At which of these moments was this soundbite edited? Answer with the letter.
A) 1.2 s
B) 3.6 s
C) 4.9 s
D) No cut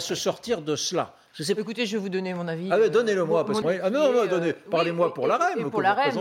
B